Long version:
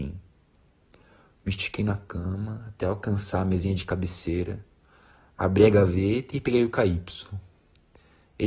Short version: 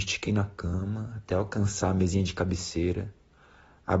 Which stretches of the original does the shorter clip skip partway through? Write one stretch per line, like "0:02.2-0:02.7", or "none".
none

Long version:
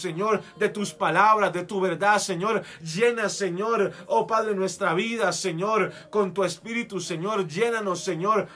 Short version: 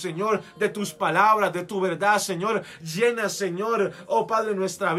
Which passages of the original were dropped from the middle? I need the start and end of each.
none

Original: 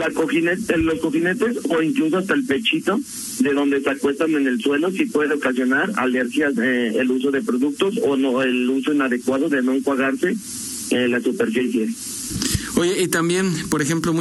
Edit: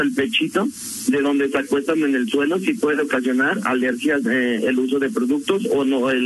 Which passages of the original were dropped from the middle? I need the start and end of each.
none

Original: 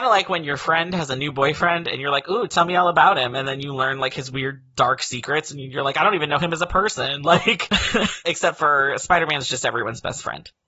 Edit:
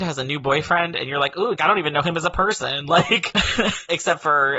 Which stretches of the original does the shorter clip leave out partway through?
0:02.5-0:05.9

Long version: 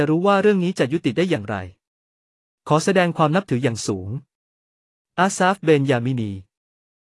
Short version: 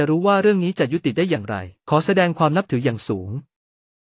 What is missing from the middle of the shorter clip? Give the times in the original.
0:01.8-0:02.6

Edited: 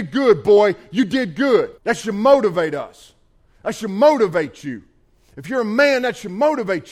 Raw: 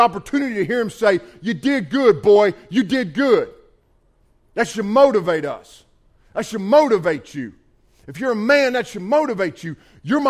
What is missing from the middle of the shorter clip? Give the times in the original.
0:03.6-0:04.5

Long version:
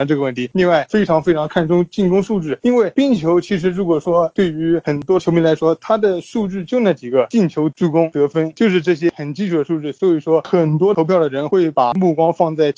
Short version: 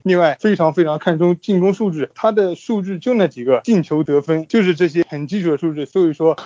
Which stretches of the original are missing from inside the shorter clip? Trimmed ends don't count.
0:02.6-0:05.8
0:07.7-0:08.1

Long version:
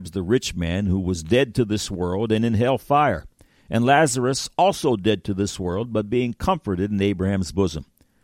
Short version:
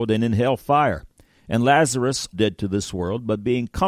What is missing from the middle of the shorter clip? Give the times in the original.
0:04.5-0:05.0

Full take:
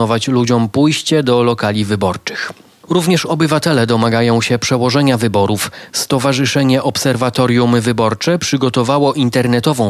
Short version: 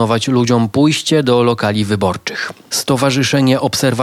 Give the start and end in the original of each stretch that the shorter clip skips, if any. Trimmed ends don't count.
0:02.7-0:05.9

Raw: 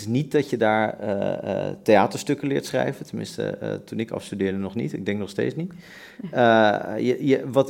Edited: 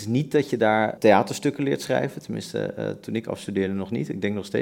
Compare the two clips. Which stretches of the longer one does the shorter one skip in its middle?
0:01.0-0:01.8

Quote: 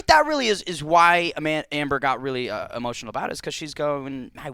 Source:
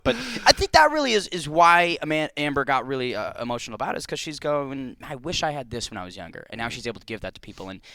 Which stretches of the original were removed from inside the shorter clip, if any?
none

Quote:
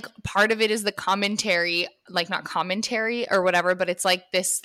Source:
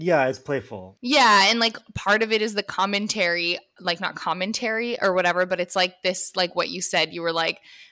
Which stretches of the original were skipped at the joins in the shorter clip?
none

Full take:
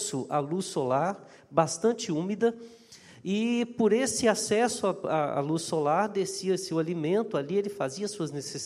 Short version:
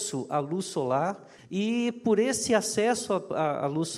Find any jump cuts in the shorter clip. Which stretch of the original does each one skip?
0:01.4-0:03.1

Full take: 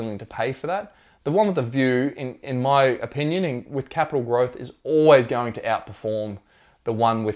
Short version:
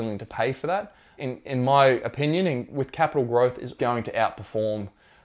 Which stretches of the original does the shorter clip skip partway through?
0:01.2-0:02.1
0:04.8-0:05.3

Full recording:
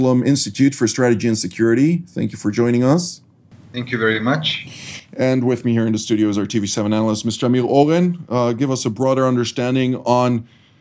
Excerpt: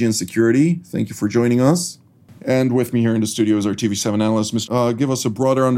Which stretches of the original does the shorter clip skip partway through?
0:03.6-0:05.1
0:07.4-0:08.3

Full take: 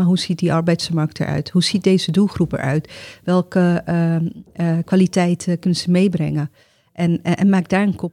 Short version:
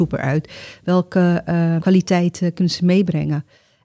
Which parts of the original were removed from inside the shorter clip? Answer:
0:04.2-0:04.8

